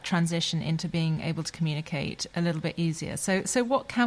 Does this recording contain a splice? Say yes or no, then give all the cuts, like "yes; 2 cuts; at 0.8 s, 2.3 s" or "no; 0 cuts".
no; 0 cuts